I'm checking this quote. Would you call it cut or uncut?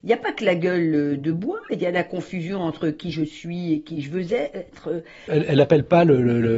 cut